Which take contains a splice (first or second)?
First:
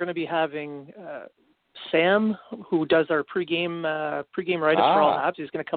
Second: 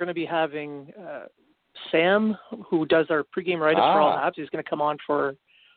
second